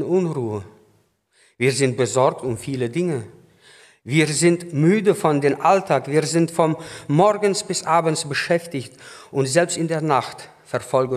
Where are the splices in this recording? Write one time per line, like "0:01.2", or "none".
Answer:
none